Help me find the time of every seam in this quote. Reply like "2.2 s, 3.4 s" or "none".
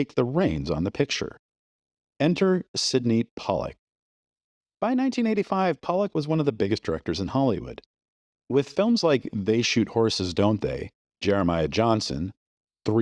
none